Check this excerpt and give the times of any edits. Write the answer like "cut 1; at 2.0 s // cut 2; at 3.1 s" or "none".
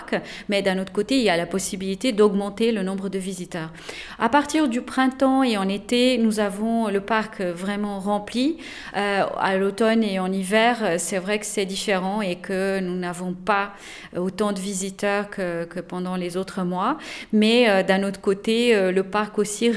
none